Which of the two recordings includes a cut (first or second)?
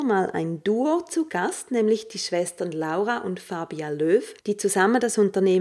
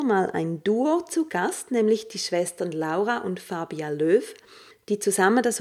first